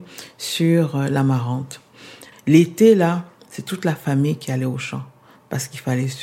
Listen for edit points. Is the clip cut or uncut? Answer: cut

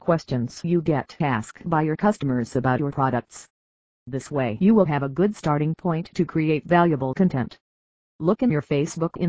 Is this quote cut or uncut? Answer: uncut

